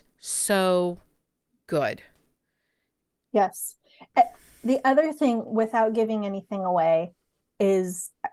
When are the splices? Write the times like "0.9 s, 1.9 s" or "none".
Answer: none

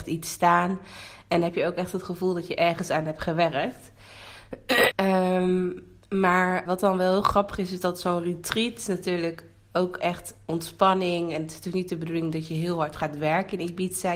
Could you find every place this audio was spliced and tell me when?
4.9 s, 6.7 s

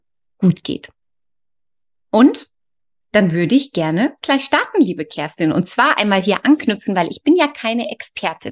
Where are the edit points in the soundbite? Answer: none

